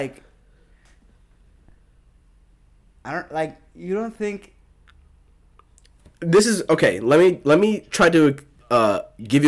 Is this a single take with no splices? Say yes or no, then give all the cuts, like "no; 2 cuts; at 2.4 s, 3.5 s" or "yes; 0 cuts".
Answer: yes; 0 cuts